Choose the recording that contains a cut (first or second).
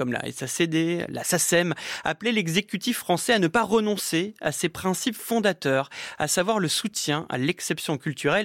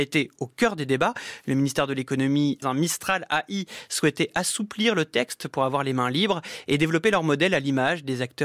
second